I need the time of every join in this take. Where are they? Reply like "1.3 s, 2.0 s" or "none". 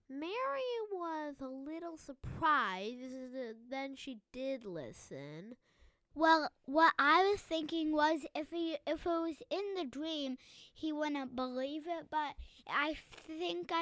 6.1 s